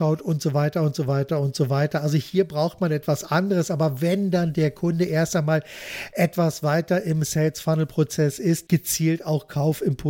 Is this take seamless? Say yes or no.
no